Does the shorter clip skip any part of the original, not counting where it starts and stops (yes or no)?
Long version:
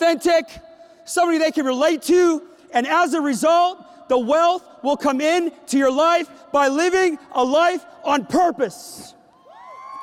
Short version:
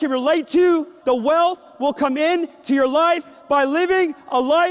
yes